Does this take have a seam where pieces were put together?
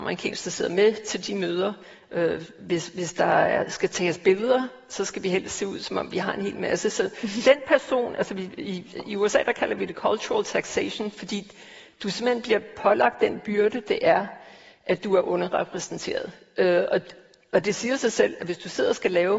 no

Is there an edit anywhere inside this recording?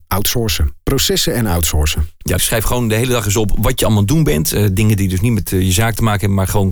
yes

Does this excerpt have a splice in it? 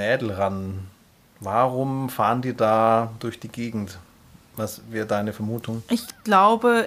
no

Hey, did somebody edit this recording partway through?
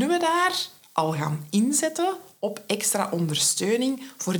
no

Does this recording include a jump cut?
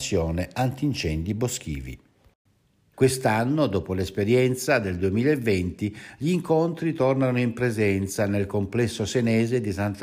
yes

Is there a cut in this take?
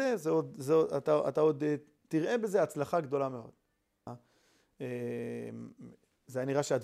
yes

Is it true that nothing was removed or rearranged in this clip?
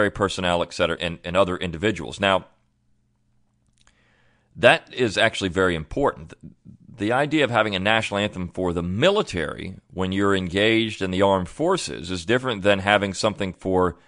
no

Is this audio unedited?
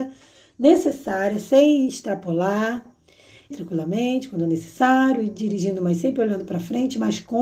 no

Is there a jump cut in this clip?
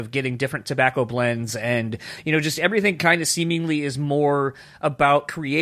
no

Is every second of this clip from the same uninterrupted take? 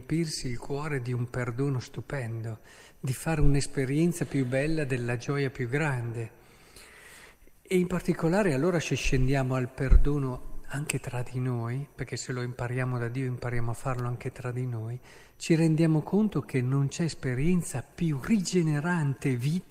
yes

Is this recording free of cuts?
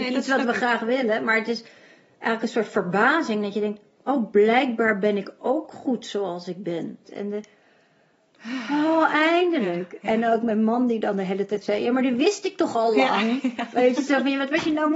no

